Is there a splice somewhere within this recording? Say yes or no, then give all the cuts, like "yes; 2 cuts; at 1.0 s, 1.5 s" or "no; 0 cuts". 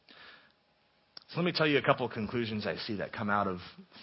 no; 0 cuts